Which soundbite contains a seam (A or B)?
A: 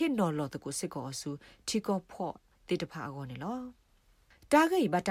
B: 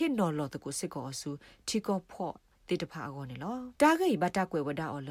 B